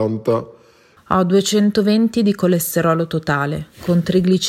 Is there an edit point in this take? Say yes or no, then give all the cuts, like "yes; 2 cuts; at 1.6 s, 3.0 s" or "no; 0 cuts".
yes; 1 cut; at 1.0 s